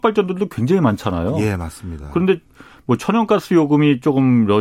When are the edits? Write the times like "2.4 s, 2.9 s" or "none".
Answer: none